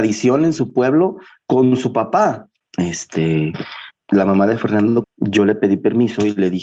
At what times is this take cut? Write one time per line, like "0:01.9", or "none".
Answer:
0:02.6
0:03.9
0:05.0

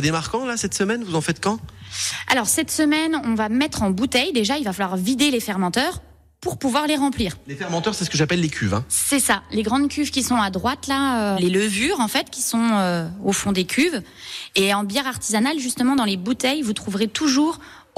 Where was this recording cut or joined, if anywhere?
0:11.4

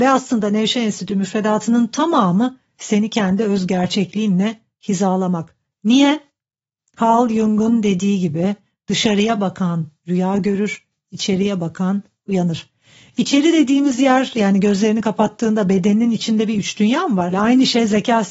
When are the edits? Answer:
0:17.3

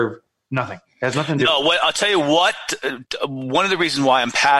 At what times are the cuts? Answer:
none

